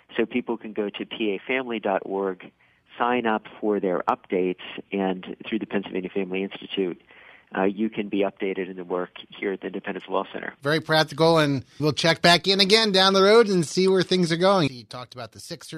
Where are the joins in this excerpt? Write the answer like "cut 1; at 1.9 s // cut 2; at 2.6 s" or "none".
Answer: cut 1; at 10.6 s // cut 2; at 11.8 s // cut 3; at 14.7 s